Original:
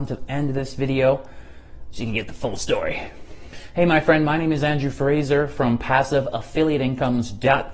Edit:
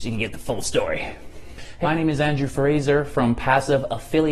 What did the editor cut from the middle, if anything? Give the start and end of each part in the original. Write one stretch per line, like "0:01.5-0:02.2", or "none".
0:03.8-0:04.3